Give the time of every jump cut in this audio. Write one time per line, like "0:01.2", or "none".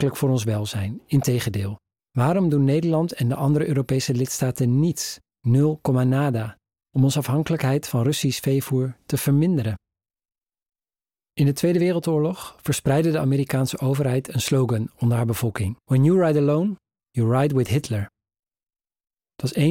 0:02.0
0:15.8